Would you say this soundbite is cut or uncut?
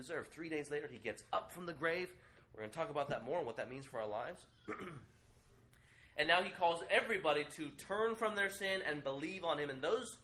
uncut